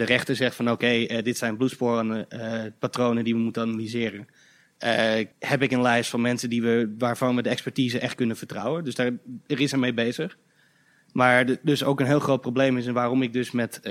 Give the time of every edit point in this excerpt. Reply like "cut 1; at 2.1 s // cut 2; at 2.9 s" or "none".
cut 1; at 5.3 s